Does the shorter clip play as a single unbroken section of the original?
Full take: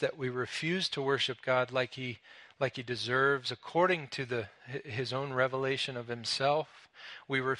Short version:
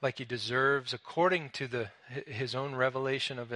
yes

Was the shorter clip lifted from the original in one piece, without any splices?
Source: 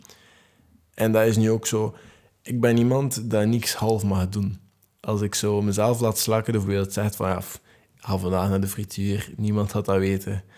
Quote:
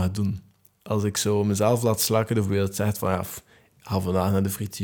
yes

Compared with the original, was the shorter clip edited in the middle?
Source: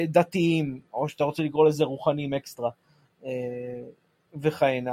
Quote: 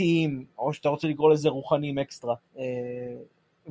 yes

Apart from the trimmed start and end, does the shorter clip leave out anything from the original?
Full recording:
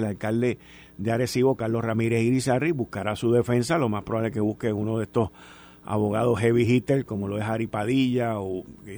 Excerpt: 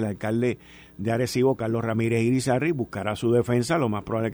no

